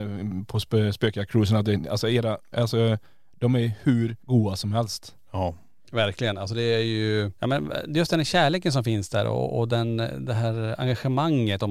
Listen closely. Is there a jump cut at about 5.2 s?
no; 1 cut; at 2.5 s

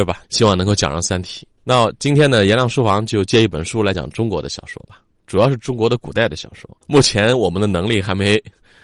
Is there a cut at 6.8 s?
yes; 2 cuts; at 3.9 s, 6.8 s

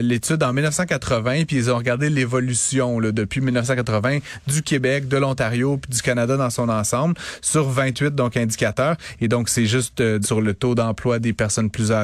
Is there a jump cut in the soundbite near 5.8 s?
no; 2 cuts; at 9.2 s, 10.2 s

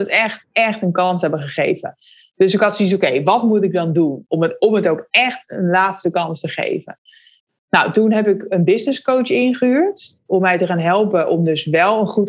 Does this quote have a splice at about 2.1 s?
no; 0 cuts

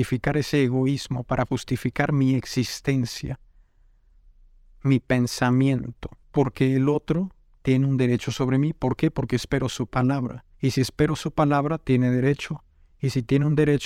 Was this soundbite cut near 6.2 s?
yes; 2 cuts; at 6.2 s, 10.5 s

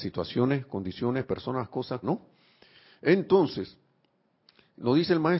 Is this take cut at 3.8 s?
no; 1 cut; at 2.0 s

